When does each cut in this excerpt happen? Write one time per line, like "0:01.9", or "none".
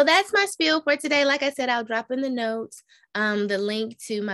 none